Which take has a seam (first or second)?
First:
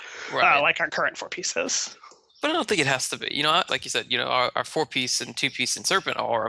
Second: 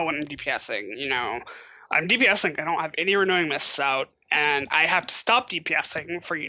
first